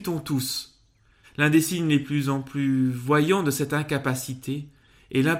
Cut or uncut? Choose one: cut